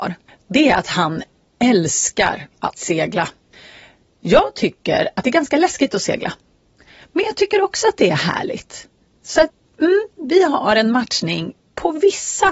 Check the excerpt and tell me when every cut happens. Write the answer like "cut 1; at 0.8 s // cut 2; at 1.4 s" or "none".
none

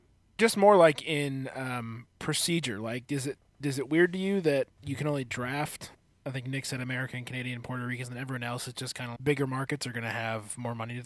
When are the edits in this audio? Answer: cut 1; at 9.2 s

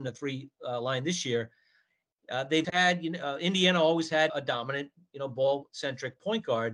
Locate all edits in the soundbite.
cut 1; at 2.6 s // cut 2; at 4.3 s

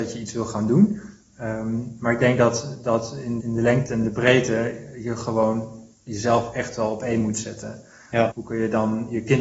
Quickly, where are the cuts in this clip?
cut 1; at 3.4 s // cut 2; at 8.3 s

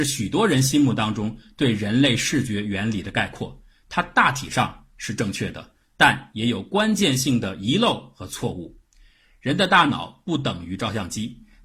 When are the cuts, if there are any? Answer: none

